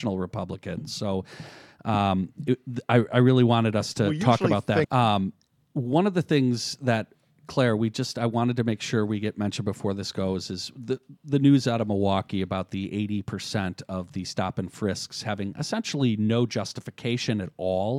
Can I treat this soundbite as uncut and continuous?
no; 1 cut; at 4.8 s

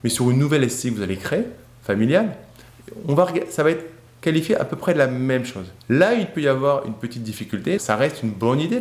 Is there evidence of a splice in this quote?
yes; 2 cuts; at 5.8 s, 7.8 s

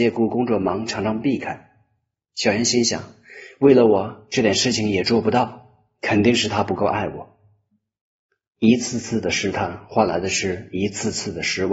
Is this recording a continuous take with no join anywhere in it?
yes; 0 cuts

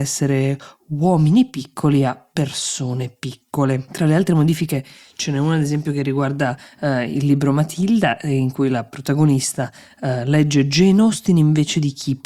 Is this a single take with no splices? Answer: yes; 0 cuts

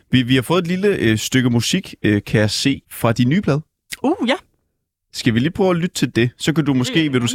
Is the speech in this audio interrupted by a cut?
yes; 1 cut; at 2.8 s

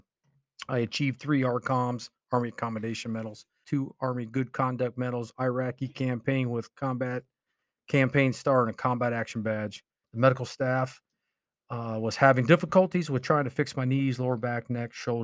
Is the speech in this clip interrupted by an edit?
yes; 2 cuts; at 3.6 s, 10.0 s

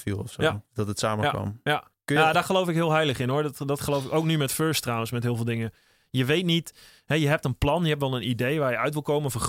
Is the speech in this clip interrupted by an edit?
no; 0 cuts

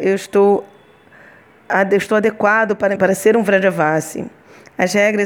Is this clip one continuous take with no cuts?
no; 1 cut; at 3.0 s

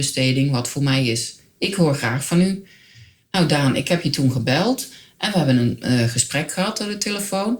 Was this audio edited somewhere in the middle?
no; 0 cuts

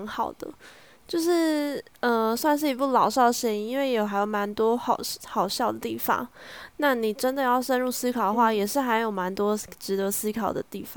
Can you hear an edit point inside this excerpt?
no; 0 cuts

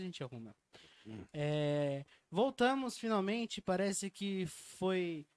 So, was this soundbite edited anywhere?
no; 0 cuts

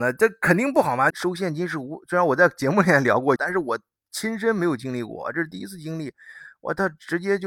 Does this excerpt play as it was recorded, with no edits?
no; 2 cuts; at 1.1 s, 3.4 s

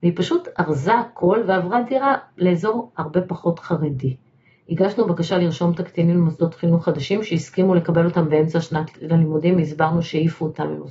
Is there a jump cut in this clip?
no; 0 cuts

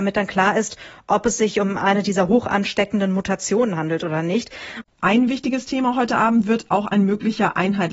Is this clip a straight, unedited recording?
no; 1 cut; at 4.8 s

